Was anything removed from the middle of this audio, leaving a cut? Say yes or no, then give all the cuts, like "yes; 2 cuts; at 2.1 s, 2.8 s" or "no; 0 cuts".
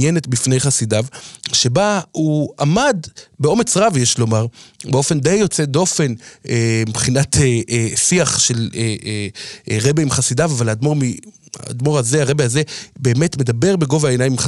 no; 0 cuts